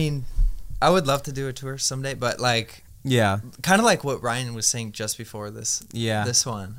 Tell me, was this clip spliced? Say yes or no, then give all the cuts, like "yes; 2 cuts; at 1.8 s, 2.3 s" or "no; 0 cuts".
no; 0 cuts